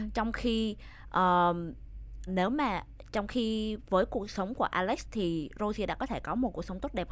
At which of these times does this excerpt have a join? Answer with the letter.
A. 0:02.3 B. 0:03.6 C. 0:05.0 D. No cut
A